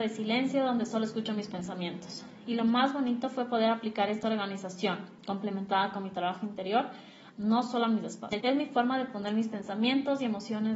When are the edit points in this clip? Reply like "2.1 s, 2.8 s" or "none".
7.3 s, 8.4 s